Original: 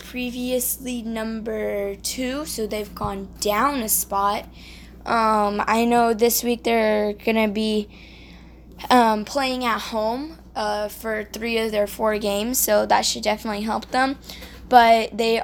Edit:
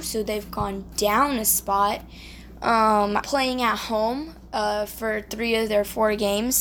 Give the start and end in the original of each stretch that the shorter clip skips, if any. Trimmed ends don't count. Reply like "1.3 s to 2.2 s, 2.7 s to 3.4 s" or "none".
5.7 s to 9.2 s